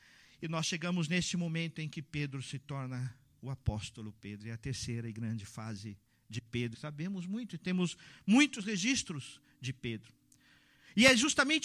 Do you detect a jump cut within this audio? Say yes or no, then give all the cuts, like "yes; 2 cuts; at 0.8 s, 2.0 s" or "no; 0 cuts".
yes; 1 cut; at 6.7 s